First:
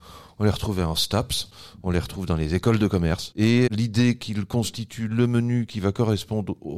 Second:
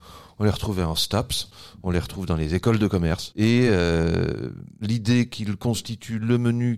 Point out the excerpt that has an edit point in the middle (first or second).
first